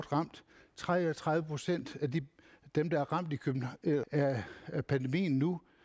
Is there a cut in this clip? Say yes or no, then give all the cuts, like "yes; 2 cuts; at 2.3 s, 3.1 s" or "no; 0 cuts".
yes; 1 cut; at 4.0 s